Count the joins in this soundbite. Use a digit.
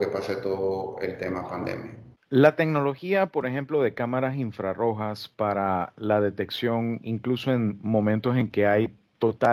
1